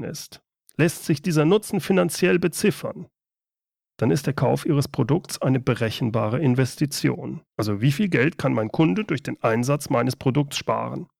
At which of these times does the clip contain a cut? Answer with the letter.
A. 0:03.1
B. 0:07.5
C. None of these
B